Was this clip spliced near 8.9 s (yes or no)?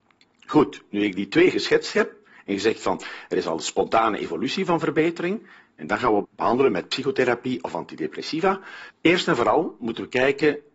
yes